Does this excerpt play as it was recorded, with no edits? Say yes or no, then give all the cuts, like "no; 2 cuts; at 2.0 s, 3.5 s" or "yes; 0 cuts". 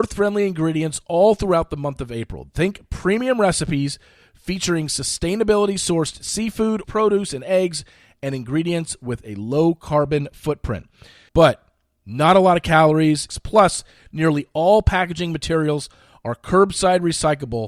no; 3 cuts; at 6.8 s, 11.3 s, 13.3 s